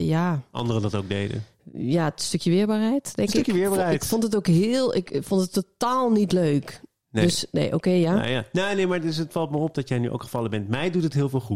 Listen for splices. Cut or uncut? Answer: uncut